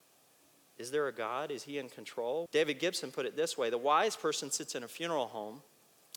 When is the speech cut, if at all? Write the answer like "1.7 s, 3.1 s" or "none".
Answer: 2.5 s